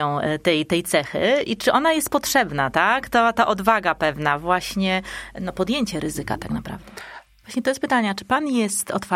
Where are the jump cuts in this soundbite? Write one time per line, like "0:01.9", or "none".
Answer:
0:07.4